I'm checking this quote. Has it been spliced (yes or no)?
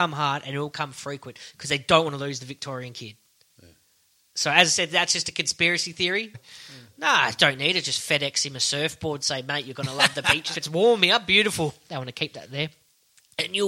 yes